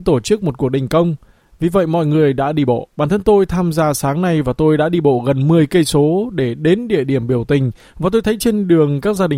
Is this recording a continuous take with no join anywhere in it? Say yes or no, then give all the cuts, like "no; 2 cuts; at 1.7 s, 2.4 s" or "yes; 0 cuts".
no; 1 cut; at 2.9 s